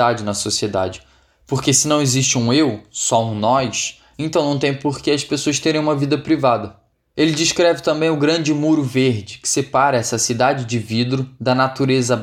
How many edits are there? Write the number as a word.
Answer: zero